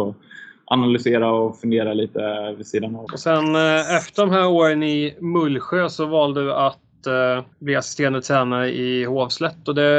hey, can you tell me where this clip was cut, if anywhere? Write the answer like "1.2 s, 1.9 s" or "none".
3.1 s, 7.5 s